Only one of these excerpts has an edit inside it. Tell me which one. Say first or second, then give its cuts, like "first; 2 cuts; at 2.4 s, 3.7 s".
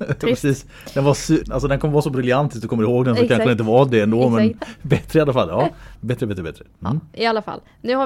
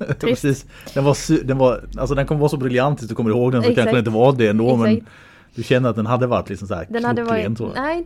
first; 3 cuts; at 1.4 s, 4.6 s, 5.9 s